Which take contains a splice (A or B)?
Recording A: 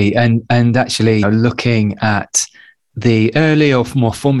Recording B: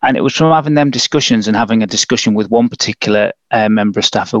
A